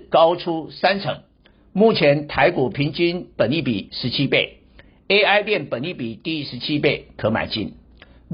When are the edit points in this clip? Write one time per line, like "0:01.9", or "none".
none

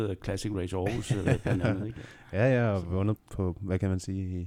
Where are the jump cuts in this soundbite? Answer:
0:03.2

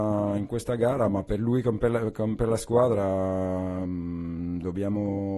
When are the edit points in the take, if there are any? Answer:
none

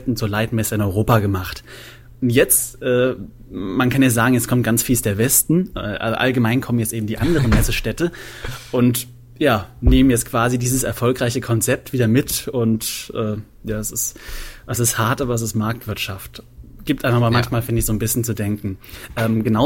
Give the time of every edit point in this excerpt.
none

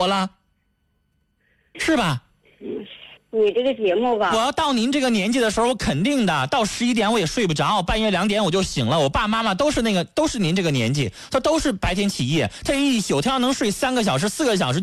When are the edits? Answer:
0:01.7
0:03.2

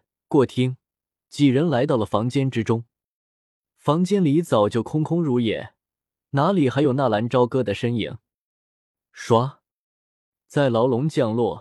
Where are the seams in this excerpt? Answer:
0:09.0

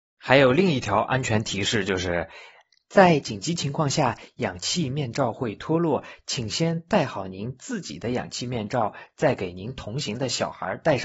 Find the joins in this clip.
none

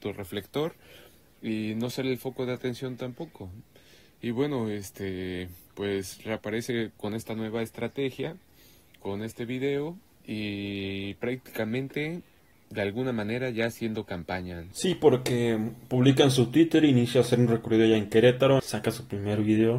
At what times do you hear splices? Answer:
0:18.6

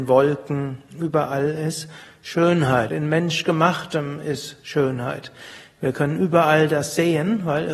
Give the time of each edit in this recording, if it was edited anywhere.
0:02.9

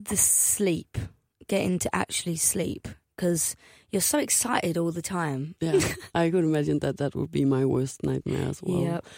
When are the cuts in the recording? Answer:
0:05.6

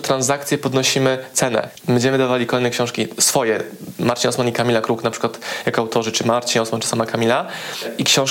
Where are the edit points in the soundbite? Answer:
0:01.8

